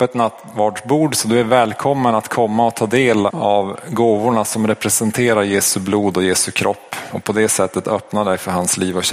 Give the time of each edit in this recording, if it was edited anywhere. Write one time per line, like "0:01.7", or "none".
0:03.3